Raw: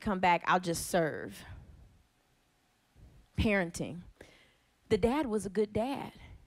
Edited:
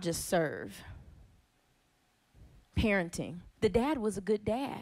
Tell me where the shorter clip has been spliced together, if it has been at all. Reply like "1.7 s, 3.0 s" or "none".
3.5 s